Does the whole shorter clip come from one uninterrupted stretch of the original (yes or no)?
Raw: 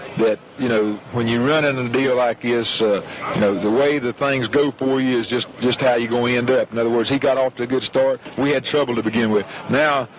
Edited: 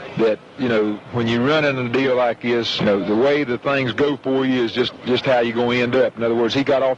no